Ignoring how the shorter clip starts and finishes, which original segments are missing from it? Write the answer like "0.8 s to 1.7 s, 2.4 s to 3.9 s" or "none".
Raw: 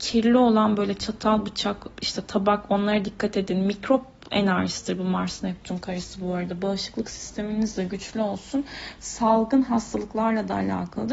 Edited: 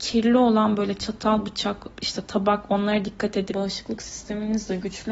3.5 s to 6.6 s